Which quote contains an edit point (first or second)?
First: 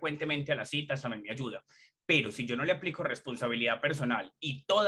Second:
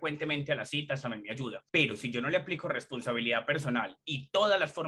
second